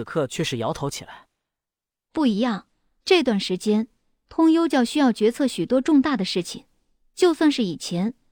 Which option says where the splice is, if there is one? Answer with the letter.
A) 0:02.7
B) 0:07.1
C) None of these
C